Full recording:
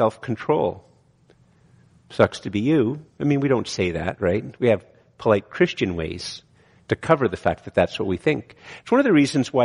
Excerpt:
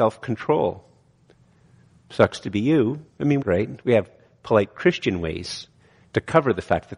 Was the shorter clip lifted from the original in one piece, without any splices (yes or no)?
no